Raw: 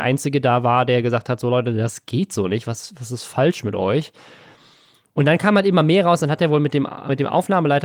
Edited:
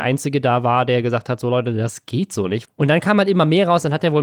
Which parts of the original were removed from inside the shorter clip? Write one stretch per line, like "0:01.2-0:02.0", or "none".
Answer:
0:02.6-0:05.0